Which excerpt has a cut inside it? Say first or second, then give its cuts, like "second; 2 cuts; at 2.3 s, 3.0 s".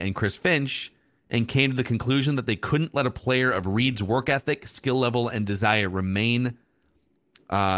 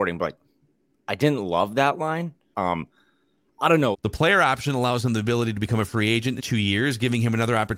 second; 3 cuts; at 2.5 s, 3.9 s, 6.4 s